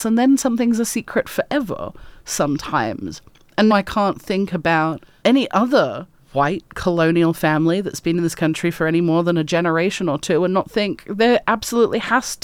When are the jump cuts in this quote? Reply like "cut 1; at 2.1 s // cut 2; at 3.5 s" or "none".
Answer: cut 1; at 3.7 s